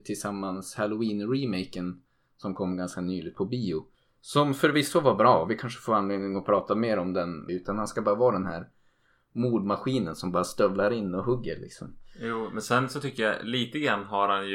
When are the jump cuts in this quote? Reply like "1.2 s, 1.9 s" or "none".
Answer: 7.5 s